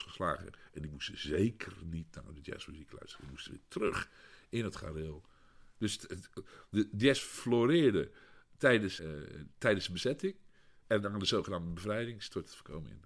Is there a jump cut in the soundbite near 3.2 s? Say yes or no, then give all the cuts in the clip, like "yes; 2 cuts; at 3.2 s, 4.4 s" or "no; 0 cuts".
no; 1 cut; at 9.0 s